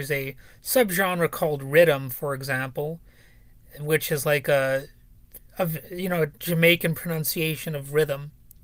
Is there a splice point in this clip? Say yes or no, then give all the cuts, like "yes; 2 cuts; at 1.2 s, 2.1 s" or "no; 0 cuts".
yes; 1 cut; at 5.5 s